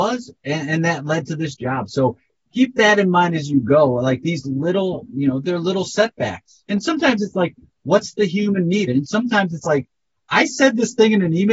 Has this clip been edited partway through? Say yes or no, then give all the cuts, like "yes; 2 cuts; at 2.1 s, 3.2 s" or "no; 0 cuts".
yes; 3 cuts; at 5.1 s, 6.6 s, 8.9 s